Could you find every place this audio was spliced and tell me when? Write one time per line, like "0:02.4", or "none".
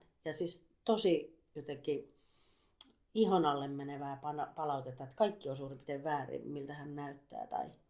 none